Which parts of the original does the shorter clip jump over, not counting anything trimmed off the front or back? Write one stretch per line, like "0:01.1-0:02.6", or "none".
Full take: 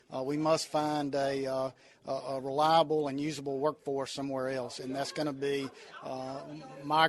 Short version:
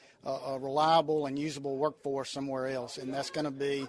none